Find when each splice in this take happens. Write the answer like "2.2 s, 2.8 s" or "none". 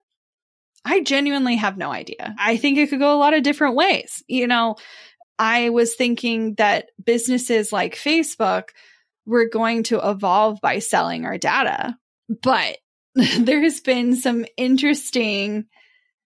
5.2 s